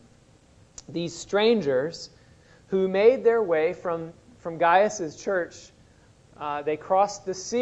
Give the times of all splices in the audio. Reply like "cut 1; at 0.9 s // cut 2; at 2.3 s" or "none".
none